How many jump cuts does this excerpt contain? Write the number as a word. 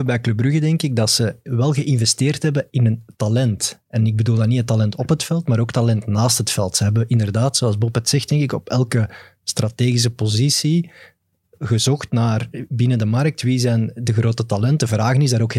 zero